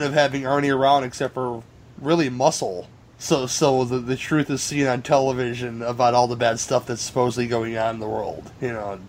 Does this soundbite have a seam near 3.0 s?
no; 0 cuts

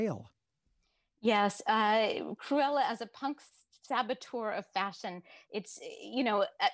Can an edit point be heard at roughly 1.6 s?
no; 0 cuts

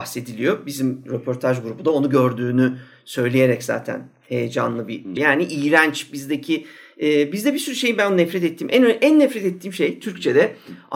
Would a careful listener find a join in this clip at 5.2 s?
yes; 1 cut; at 5.2 s

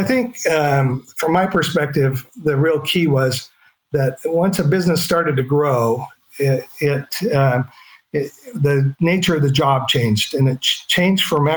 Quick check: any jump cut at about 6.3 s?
no; 0 cuts

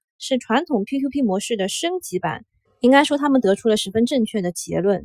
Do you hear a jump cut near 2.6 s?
yes; 1 cut; at 2.6 s

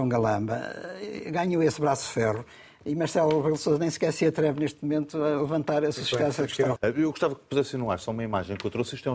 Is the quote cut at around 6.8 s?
yes; 1 cut; at 6.8 s

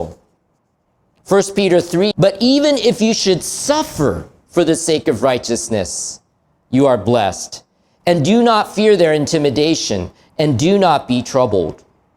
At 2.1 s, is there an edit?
yes; 1 cut; at 2.1 s

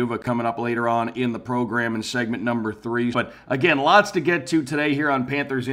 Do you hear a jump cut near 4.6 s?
no; 1 cut; at 3.1 s

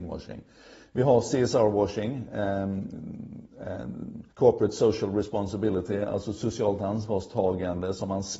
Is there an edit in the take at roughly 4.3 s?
yes; 1 cut; at 4.3 s

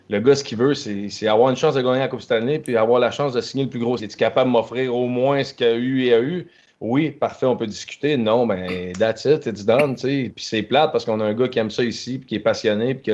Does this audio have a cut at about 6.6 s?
no; 1 cut; at 4.0 s

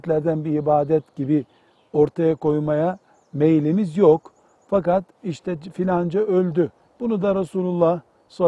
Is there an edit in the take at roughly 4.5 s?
no; 1 cut; at 6.8 s

